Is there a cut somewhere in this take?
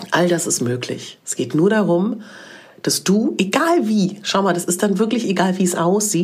no; 0 cuts

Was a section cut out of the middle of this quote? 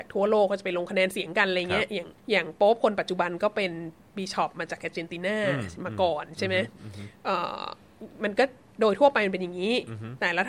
yes; 1 cut; at 2.2 s

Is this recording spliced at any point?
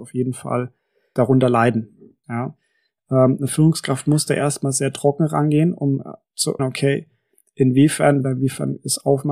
yes; 3 cuts; at 2.2 s, 6.6 s, 8.2 s

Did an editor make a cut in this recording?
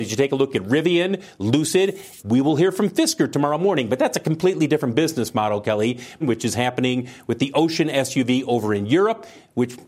yes; 2 cuts; at 2.2 s, 6.2 s

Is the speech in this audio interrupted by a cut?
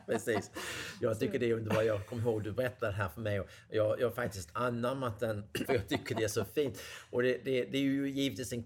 yes; 1 cut; at 5.6 s

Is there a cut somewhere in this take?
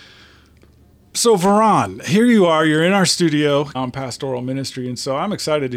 yes; 1 cut; at 3.7 s

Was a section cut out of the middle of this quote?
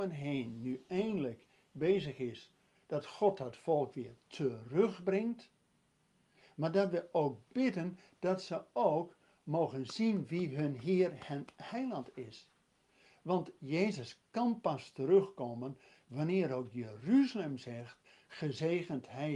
no; 0 cuts

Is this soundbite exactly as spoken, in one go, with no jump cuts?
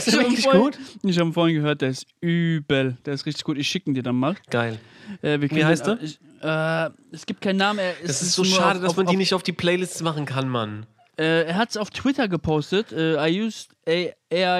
yes; 0 cuts

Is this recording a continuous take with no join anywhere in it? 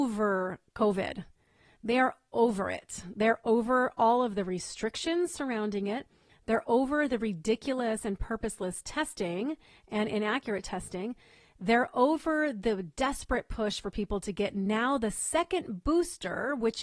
yes; 0 cuts

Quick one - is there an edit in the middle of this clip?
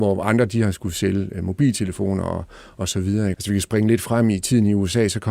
yes; 1 cut; at 3.3 s

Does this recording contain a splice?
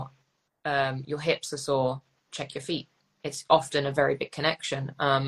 yes; 1 cut; at 1.0 s

